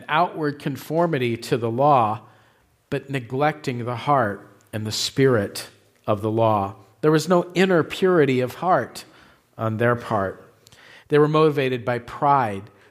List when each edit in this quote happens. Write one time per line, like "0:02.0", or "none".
none